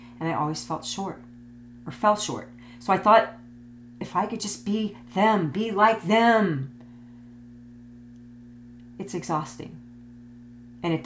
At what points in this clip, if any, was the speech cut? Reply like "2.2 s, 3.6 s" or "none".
none